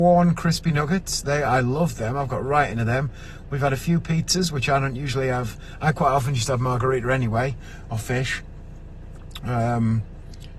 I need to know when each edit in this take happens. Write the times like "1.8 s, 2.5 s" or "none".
none